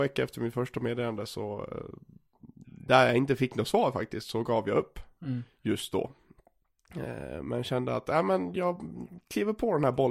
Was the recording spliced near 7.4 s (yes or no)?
no